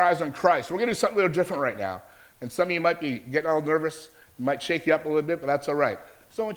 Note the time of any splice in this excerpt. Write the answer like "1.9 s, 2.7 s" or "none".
none